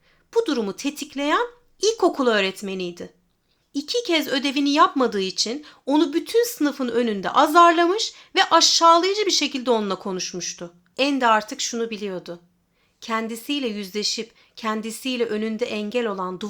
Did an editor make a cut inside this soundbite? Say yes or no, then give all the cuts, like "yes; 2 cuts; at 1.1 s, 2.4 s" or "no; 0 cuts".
yes; 1 cut; at 10.9 s